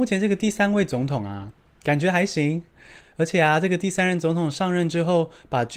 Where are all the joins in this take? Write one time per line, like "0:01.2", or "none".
0:03.0